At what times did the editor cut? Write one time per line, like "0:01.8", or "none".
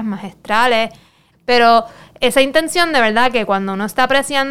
0:01.3